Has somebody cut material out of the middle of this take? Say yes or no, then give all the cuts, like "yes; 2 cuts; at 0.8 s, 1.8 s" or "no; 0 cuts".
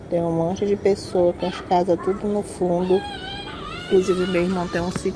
no; 0 cuts